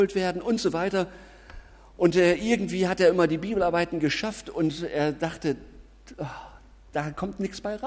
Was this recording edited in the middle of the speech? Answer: no; 0 cuts

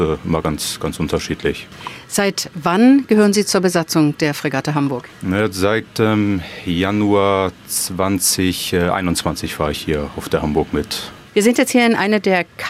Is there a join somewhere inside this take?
yes; 1 cut; at 11.3 s

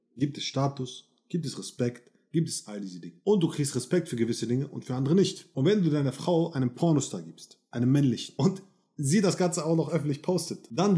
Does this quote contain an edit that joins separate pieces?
no; 0 cuts

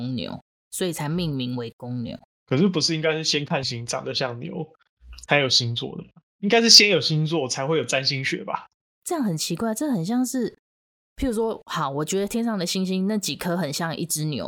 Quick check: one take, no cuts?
no; 1 cut; at 3.6 s

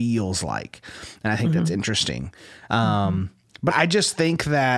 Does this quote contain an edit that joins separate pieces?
yes; 2 cuts; at 2.7 s, 3.7 s

